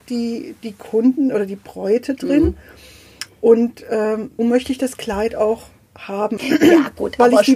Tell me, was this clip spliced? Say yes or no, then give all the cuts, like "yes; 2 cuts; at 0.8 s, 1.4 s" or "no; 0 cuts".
yes; 2 cuts; at 4.4 s, 6.4 s